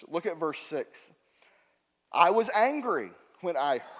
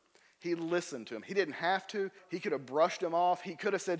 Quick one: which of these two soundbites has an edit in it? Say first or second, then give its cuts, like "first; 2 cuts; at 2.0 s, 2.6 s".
second; 1 cut; at 2.2 s